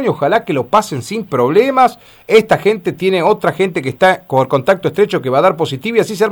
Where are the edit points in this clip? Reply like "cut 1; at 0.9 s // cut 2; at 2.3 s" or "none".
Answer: none